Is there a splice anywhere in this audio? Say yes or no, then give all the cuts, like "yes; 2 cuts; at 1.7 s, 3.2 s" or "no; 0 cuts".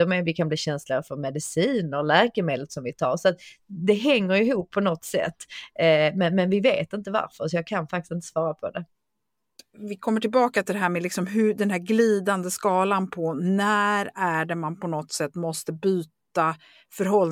no; 0 cuts